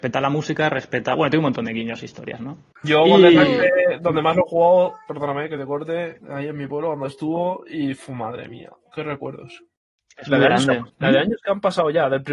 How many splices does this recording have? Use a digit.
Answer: 3